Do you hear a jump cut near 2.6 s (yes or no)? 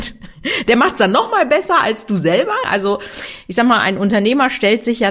yes